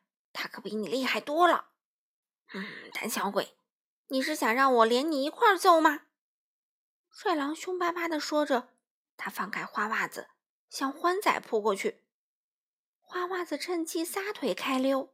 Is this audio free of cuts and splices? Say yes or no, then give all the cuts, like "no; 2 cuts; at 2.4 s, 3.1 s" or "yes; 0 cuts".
yes; 0 cuts